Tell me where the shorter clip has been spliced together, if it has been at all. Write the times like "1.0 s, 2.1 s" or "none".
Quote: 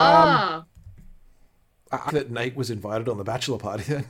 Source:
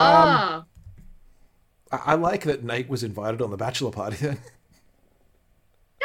2.1 s